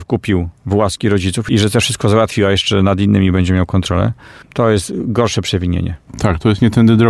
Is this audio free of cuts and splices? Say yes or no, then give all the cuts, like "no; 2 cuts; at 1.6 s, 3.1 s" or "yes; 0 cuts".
no; 1 cut; at 4.4 s